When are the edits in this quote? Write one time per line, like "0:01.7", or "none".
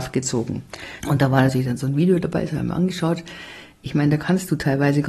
0:01.0